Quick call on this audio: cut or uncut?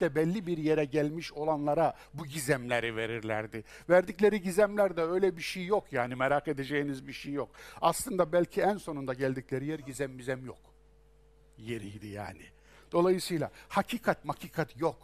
uncut